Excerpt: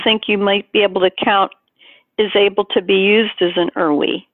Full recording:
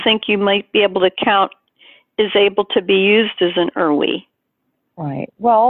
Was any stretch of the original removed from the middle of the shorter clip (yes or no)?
no